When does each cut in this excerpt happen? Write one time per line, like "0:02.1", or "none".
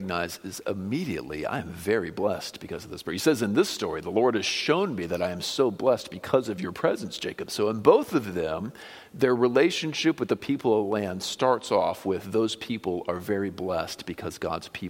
0:07.5